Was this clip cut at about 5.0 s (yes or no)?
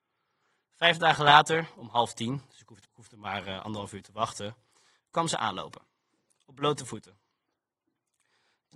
yes